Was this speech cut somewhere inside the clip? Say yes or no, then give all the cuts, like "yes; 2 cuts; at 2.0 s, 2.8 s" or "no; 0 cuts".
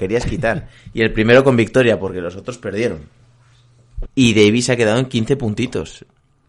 yes; 1 cut; at 4.1 s